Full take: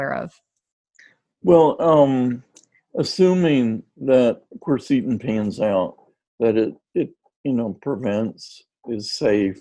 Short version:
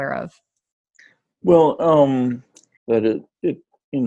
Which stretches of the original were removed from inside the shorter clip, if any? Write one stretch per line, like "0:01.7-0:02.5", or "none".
0:02.8-0:06.3